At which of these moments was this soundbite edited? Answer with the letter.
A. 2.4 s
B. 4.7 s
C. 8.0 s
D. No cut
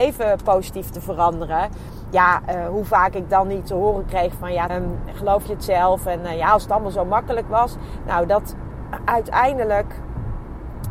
B